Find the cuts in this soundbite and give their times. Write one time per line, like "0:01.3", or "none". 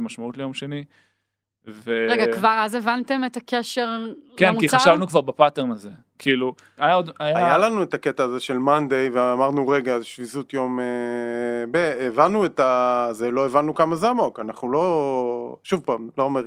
0:06.8